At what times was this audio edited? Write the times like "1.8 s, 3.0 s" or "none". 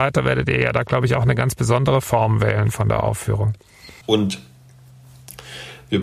4.0 s